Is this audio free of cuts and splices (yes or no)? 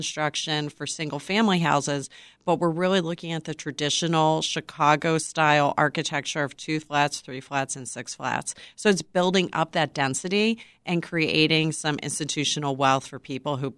yes